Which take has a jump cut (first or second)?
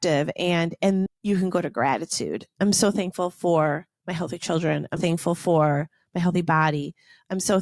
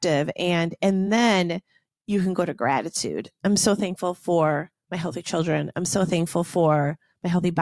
first